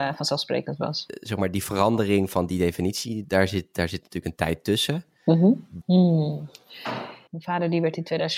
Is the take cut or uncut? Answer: cut